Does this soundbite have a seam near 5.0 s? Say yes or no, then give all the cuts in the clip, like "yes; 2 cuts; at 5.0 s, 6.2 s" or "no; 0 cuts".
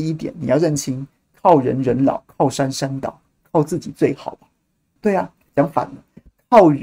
yes; 1 cut; at 5.0 s